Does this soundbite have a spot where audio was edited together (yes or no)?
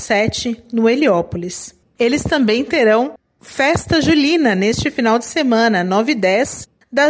no